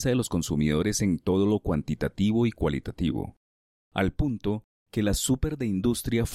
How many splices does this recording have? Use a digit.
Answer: 1